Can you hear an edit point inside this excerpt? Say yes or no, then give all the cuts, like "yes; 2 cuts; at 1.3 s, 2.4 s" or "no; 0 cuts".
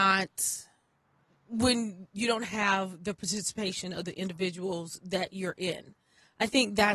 no; 0 cuts